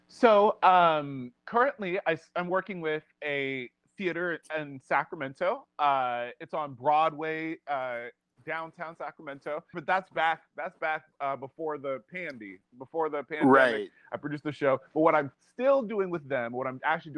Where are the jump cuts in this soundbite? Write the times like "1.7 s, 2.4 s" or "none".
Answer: 9.7 s